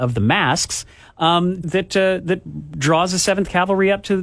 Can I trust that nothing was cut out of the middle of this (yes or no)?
no